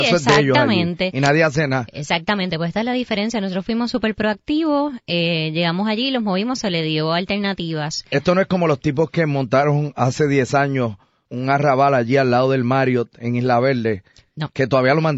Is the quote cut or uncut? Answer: cut